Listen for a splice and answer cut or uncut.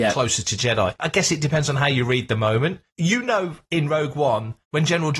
cut